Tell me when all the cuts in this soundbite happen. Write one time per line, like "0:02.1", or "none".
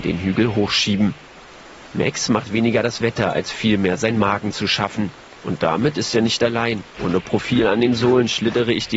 0:05.4
0:07.0